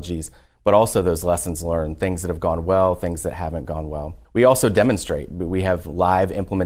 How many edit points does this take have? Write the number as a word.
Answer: one